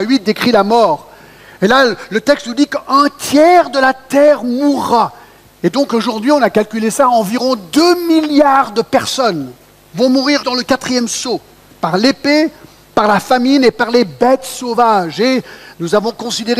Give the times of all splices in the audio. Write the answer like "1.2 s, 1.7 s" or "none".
10.4 s